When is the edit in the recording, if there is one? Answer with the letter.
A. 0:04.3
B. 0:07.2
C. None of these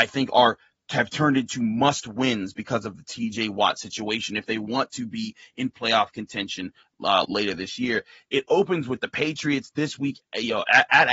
B